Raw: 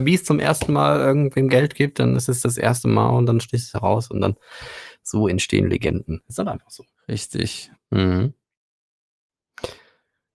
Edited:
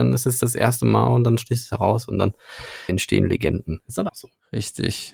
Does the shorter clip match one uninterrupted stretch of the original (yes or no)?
no